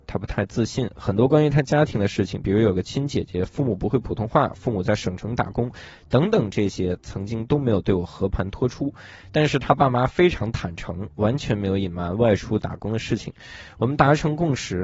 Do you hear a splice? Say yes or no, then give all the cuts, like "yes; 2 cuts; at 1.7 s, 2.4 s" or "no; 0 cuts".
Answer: no; 0 cuts